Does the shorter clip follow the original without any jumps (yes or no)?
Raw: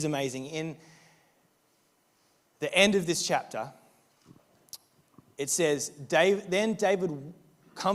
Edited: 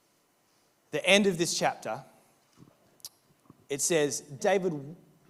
no